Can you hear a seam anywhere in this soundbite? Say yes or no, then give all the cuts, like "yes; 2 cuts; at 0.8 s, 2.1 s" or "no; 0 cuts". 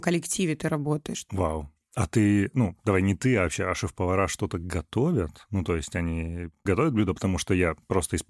no; 0 cuts